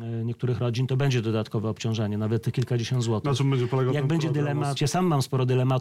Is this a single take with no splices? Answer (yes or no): no